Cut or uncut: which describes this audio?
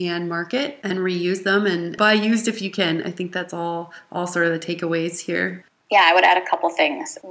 uncut